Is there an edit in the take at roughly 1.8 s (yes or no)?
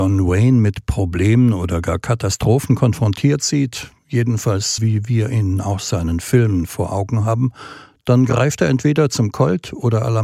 no